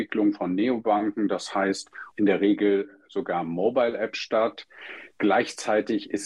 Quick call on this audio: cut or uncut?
cut